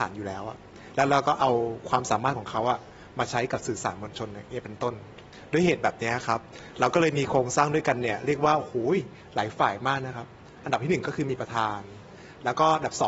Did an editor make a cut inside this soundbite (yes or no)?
no